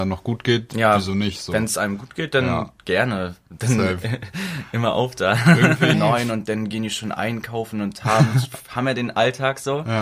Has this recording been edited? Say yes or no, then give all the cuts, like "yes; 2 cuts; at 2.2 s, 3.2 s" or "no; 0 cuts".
yes; 1 cut; at 5.9 s